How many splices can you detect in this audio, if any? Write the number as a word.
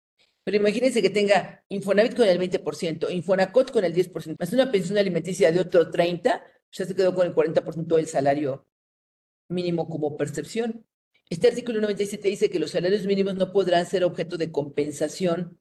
two